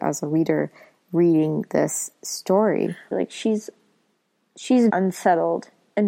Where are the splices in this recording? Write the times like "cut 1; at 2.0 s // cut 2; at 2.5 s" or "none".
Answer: cut 1; at 3.1 s // cut 2; at 4.9 s